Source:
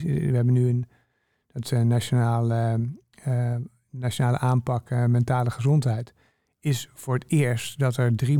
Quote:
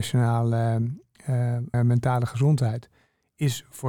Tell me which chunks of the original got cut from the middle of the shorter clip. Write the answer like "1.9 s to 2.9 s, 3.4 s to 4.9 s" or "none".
3.7 s to 5.0 s